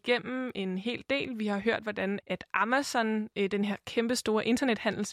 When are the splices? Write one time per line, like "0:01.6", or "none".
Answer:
0:02.2